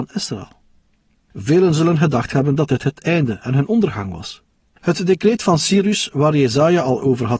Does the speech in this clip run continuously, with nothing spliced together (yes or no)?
no